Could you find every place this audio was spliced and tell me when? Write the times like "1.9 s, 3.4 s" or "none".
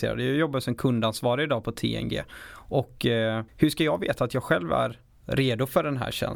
3.5 s